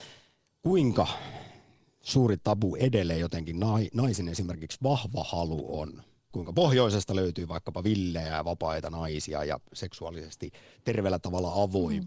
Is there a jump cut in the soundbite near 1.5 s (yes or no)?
no